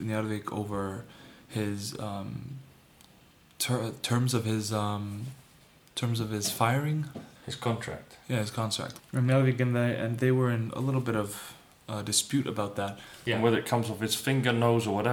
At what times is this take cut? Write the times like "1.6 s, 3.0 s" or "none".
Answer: 7.4 s, 9.0 s, 13.3 s